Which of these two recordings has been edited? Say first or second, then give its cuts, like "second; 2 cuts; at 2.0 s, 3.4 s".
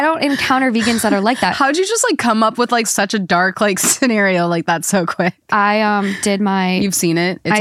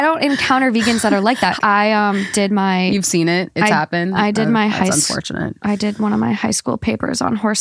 second; 1 cut; at 1.6 s